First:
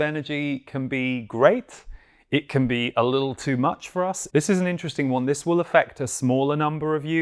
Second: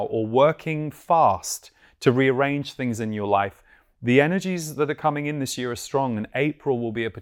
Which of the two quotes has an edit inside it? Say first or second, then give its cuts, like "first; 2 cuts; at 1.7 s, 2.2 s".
first; 1 cut; at 4.3 s